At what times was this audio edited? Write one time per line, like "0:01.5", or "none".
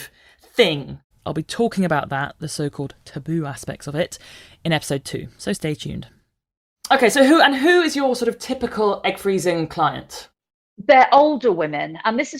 0:01.1